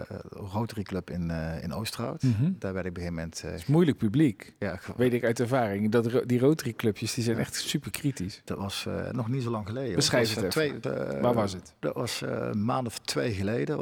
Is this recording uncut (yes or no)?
no